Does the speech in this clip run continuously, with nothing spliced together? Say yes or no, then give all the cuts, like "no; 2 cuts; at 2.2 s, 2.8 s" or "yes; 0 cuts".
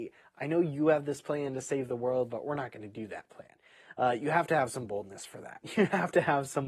yes; 0 cuts